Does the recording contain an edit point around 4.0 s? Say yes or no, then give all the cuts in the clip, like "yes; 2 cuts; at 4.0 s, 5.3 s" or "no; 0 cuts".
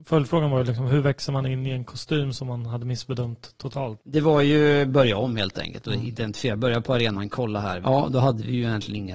yes; 2 cuts; at 4.0 s, 7.8 s